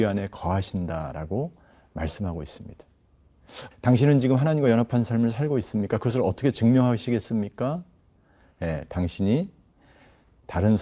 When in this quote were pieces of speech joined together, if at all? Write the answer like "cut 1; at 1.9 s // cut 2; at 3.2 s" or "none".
cut 1; at 3.7 s